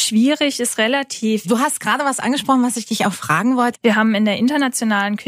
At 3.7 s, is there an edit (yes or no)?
yes